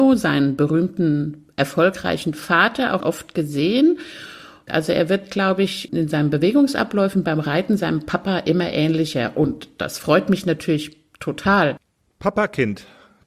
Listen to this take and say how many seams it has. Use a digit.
3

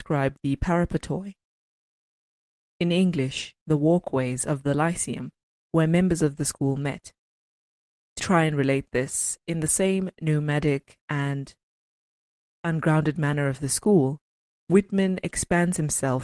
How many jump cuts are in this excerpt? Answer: 1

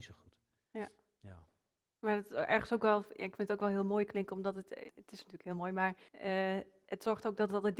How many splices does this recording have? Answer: 2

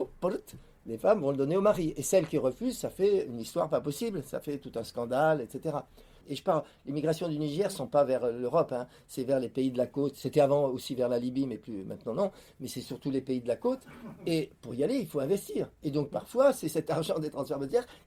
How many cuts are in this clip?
1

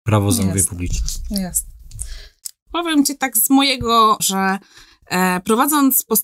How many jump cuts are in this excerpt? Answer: 2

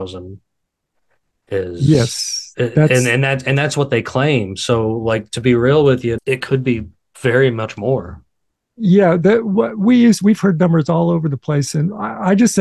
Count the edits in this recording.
1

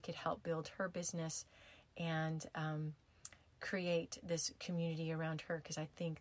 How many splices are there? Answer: 0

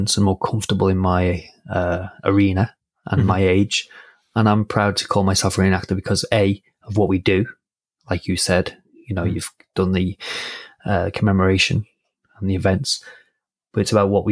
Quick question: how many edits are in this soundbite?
1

